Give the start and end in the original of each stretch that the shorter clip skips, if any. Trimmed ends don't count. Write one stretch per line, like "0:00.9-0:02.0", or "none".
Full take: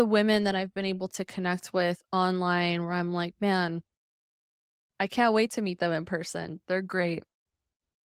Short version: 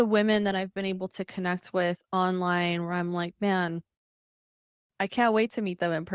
none